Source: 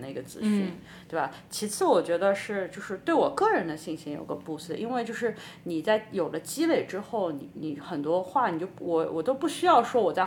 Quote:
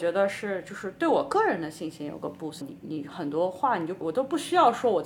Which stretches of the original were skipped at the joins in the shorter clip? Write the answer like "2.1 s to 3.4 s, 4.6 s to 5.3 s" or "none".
4.7 s to 7.3 s, 8.7 s to 9.1 s